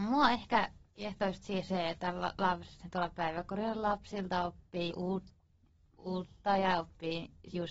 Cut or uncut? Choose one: cut